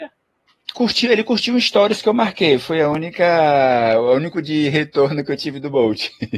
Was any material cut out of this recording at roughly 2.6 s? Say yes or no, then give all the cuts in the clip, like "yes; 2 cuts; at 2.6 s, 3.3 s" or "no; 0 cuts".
no; 1 cut; at 4.3 s